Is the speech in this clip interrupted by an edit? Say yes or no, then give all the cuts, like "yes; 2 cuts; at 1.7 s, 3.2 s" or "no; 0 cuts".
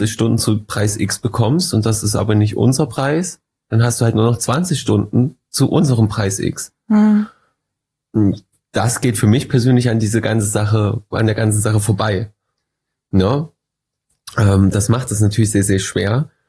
no; 0 cuts